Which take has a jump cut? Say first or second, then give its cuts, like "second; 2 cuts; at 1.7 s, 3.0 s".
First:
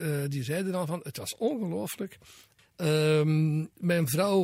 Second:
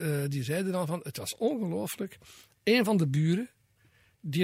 first; 1 cut; at 2.6 s